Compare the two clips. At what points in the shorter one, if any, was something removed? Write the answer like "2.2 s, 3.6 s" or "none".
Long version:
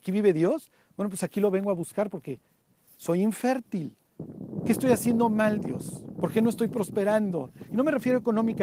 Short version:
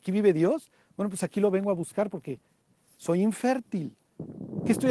none